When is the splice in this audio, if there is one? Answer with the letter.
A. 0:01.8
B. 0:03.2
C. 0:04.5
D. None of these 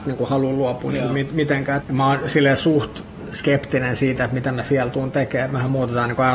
A